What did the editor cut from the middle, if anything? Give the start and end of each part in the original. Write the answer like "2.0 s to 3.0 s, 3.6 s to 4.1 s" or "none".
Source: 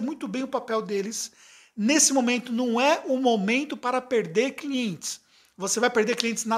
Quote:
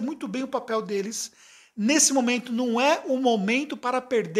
none